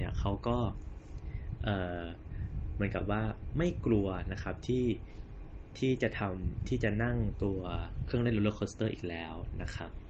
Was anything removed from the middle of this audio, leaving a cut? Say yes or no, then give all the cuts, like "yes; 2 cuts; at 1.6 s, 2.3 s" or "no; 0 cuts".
no; 0 cuts